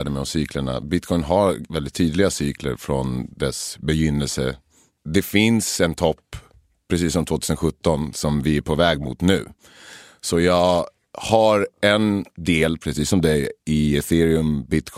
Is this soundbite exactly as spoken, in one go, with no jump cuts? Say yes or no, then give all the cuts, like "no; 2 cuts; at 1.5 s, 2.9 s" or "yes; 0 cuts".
yes; 0 cuts